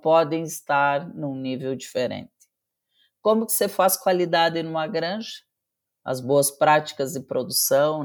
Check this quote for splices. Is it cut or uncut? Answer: cut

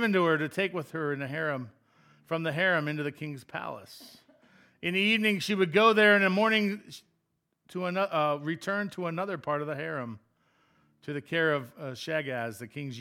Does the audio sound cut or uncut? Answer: uncut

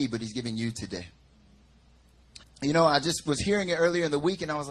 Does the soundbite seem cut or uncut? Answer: cut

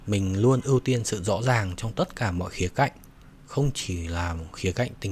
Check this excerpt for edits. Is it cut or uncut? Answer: uncut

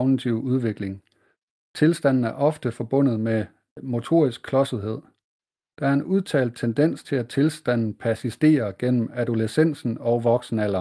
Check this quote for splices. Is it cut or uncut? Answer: uncut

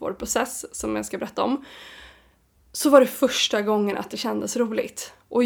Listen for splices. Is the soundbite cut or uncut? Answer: uncut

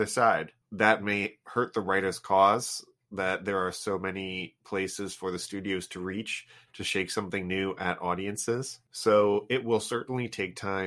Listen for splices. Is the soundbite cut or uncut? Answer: uncut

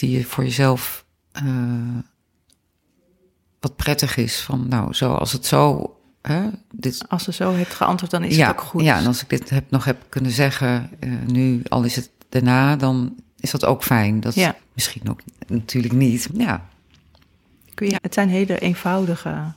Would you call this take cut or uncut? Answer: cut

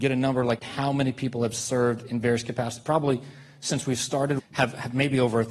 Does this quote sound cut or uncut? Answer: cut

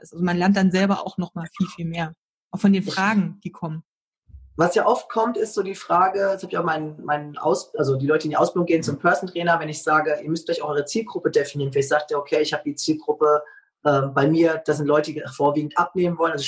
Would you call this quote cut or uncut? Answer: uncut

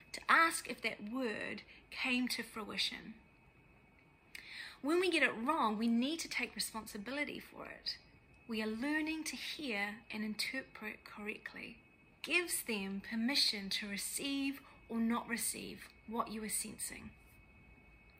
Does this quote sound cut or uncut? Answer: cut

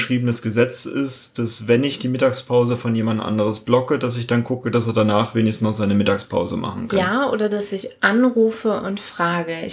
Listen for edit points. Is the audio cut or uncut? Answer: uncut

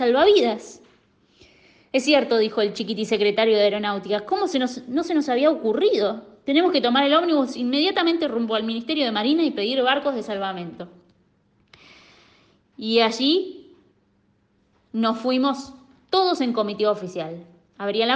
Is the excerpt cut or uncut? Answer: uncut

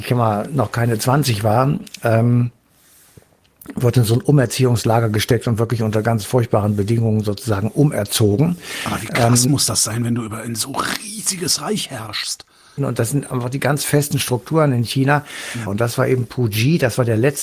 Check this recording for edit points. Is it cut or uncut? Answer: cut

